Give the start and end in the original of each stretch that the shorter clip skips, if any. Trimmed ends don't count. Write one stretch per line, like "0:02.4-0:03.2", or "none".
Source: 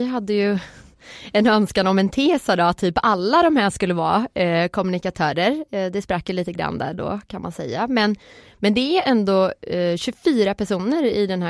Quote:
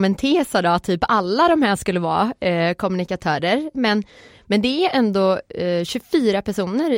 0:05.7-0:07.9